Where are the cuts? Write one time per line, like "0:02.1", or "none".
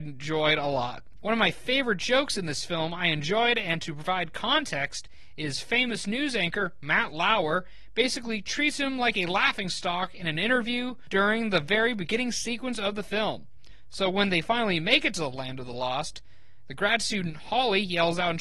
0:01.2